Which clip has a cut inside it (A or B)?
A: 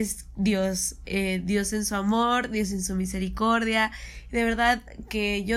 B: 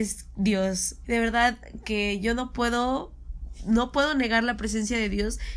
B